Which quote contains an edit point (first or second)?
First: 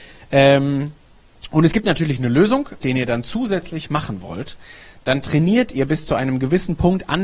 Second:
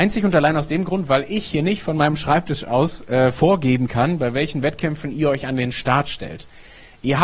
first